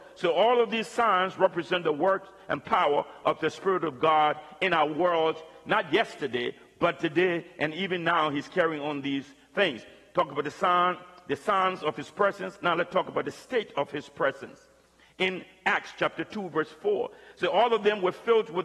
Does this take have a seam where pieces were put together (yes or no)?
no